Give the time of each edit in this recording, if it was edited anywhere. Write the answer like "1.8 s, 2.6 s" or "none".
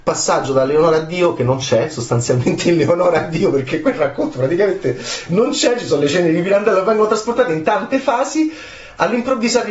none